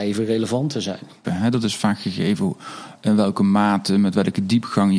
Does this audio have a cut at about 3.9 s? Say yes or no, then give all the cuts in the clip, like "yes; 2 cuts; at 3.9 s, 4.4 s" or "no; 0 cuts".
no; 1 cut; at 1.2 s